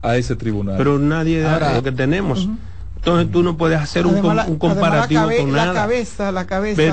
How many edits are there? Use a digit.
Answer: 1